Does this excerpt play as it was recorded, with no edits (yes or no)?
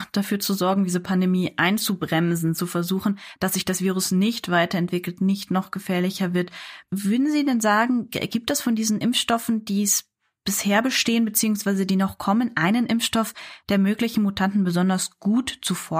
yes